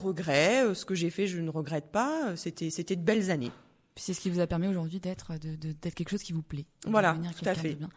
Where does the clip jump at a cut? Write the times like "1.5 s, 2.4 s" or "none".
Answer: none